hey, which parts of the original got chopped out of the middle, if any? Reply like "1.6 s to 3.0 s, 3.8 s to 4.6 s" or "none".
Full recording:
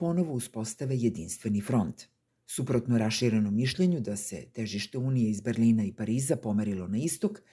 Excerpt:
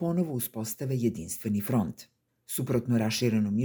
none